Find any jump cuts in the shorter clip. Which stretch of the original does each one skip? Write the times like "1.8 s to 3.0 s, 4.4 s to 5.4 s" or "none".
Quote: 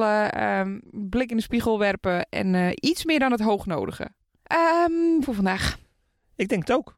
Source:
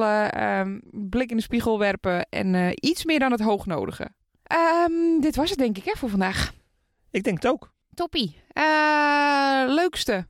5.2 s to 6.0 s